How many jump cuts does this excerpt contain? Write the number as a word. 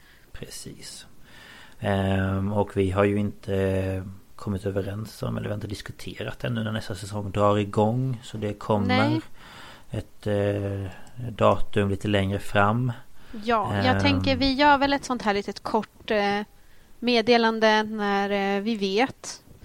zero